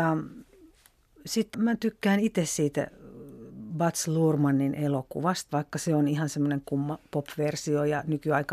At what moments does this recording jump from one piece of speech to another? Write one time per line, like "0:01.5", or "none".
0:01.5
0:05.5